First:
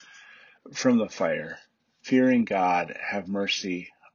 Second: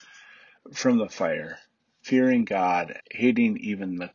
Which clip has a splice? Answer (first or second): second